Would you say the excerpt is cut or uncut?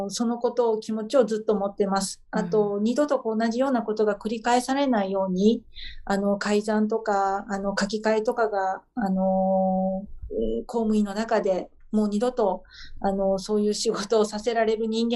uncut